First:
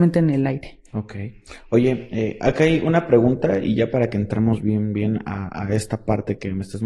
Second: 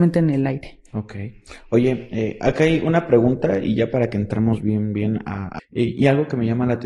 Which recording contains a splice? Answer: second; 1 cut; at 5.6 s

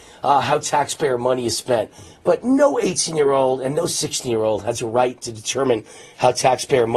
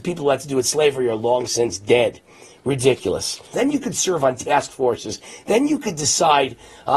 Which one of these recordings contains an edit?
second; 1 cut; at 3.5 s

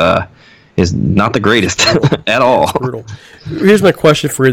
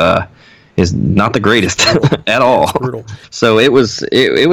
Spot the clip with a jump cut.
second; 1 cut; at 3.2 s

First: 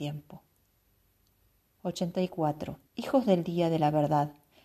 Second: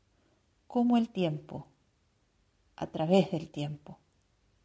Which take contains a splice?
first; 2 cuts; at 1.8 s, 2.9 s

